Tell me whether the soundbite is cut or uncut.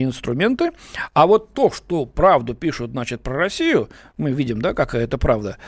uncut